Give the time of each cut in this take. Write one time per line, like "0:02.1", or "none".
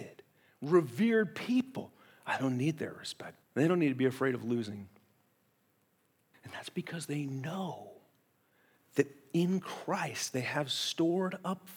0:03.4
0:06.3